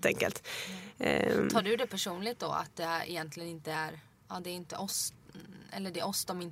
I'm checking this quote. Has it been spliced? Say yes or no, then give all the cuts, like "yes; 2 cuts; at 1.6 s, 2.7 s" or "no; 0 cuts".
no; 0 cuts